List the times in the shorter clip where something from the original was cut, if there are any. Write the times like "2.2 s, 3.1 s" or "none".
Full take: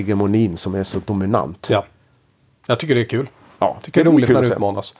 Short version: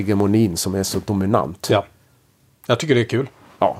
none